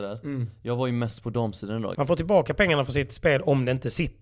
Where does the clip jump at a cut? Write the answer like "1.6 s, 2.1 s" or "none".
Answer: 1.9 s